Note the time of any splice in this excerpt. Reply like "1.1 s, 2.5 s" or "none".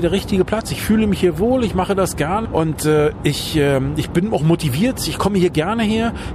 2.5 s